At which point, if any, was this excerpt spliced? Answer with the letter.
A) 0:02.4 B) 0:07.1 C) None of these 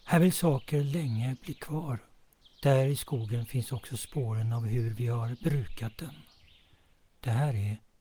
A